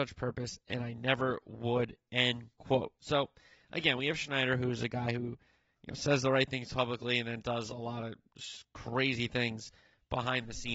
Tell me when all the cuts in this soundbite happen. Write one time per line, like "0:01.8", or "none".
none